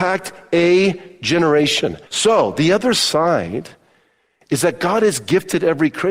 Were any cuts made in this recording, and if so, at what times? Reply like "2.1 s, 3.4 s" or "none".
2.1 s